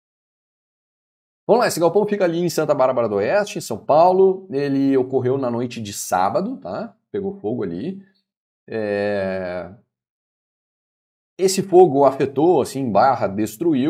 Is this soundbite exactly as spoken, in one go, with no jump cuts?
yes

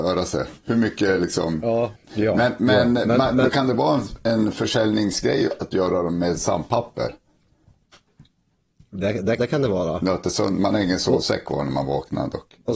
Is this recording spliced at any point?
yes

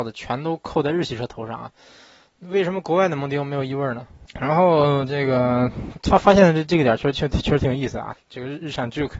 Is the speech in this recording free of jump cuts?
no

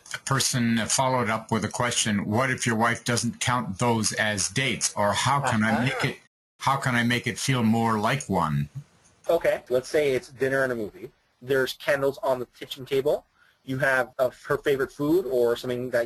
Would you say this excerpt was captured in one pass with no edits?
no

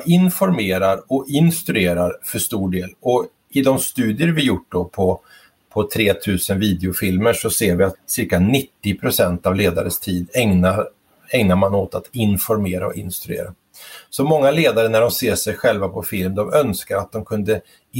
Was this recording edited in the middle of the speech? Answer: yes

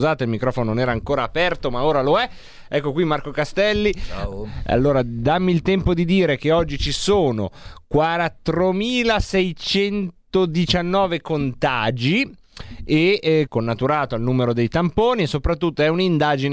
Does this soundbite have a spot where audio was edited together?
yes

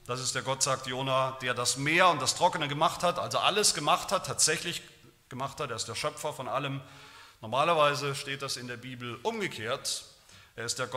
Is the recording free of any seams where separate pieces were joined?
yes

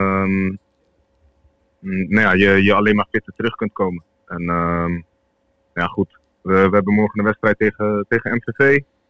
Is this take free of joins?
no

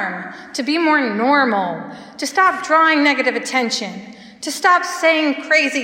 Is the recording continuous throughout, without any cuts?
yes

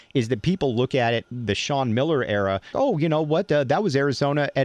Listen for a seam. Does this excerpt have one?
yes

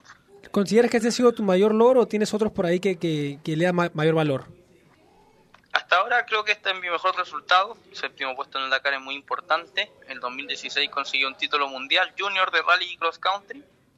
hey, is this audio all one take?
yes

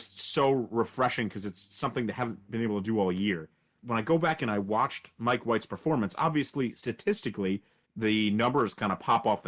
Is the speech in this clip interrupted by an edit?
no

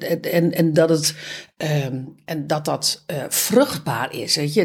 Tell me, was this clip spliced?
no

